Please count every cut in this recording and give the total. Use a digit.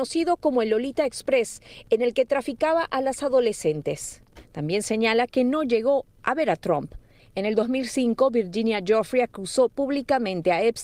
1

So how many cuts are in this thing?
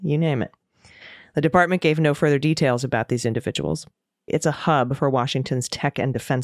1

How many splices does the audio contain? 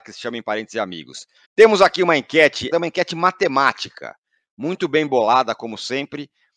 2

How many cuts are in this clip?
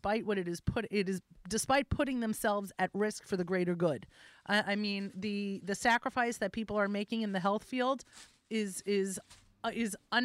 0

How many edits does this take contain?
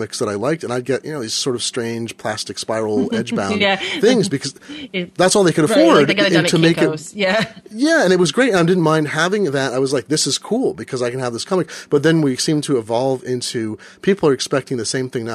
0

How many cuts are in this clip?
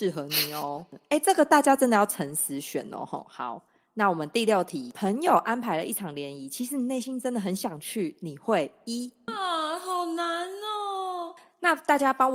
1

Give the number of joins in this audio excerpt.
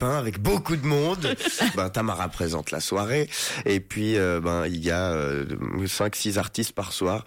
1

